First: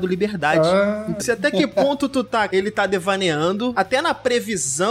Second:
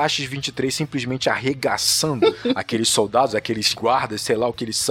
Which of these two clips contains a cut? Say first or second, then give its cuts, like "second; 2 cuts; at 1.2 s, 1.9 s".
first; 2 cuts; at 1.2 s, 2.5 s